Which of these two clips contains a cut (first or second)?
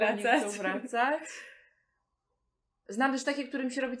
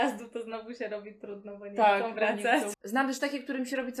second